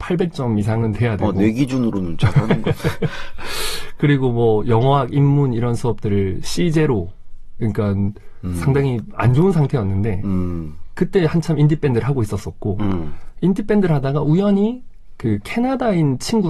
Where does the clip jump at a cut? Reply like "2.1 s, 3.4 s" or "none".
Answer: none